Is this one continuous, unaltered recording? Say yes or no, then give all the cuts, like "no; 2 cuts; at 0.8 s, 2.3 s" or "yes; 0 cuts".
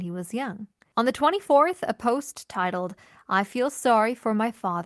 no; 1 cut; at 0.9 s